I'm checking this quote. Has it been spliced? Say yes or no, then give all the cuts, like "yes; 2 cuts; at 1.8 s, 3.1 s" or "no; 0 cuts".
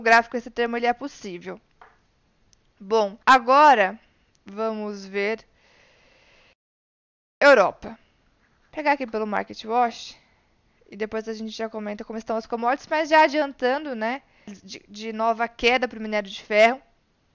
yes; 2 cuts; at 3.2 s, 14.5 s